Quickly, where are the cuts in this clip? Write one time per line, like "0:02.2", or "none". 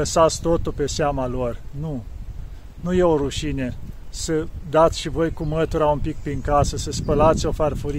none